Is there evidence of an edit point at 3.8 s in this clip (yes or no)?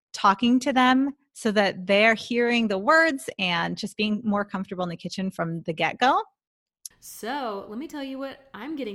no